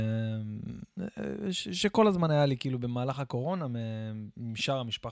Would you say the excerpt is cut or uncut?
uncut